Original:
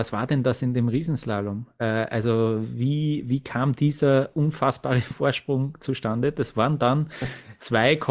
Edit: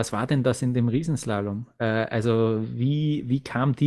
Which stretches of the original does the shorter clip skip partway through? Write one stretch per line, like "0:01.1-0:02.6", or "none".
none

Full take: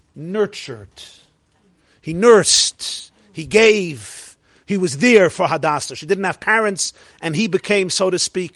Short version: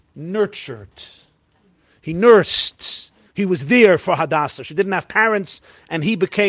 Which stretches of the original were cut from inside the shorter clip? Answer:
0:03.3-0:04.6

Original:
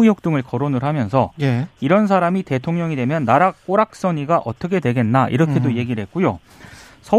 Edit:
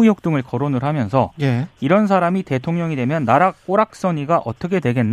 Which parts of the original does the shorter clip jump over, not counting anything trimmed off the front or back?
none

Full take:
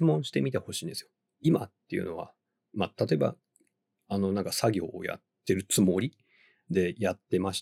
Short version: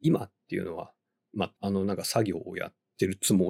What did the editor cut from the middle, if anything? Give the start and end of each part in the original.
0:03.0-0:04.0

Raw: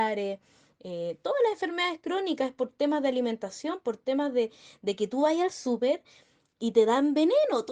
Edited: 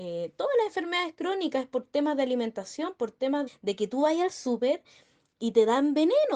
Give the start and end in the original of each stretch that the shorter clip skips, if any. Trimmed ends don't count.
0:04.3-0:04.7

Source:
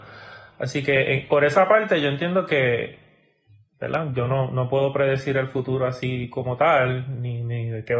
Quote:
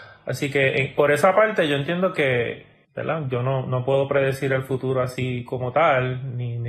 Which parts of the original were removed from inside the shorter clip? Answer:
0:03.2-0:03.7

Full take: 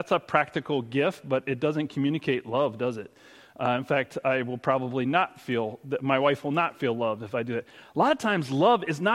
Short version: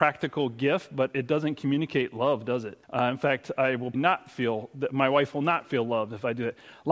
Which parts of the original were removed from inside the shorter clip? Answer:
0:03.2-0:03.5
0:04.6-0:05.0

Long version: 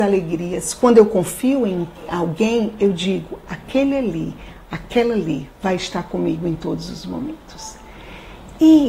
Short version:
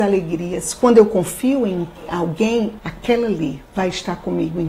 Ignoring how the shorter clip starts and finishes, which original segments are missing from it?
0:02.8-0:04.6

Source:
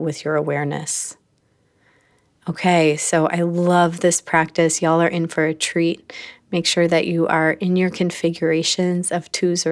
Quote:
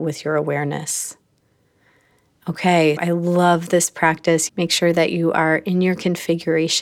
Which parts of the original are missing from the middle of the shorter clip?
0:03.0-0:03.3
0:04.8-0:06.4

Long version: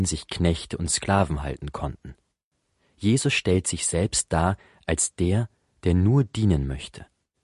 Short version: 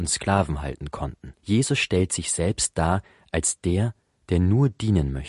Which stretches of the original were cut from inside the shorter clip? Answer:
0:02.2-0:02.9

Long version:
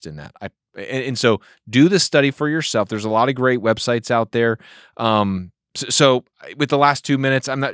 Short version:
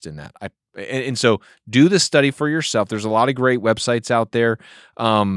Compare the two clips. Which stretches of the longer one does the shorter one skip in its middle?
none

